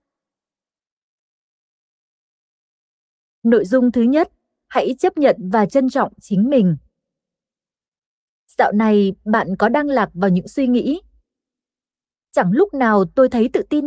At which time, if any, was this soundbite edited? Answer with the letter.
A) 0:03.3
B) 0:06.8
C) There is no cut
C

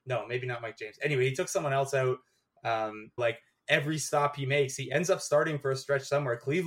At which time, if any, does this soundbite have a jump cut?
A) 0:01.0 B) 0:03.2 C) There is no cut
B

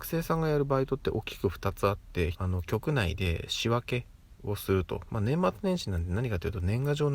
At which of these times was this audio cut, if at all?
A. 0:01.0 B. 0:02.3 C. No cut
B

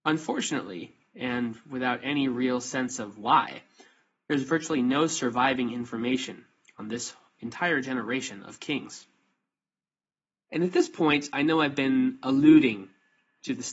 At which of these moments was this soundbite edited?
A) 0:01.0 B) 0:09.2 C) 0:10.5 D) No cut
C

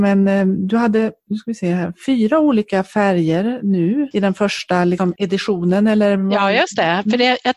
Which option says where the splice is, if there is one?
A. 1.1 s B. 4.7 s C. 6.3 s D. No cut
D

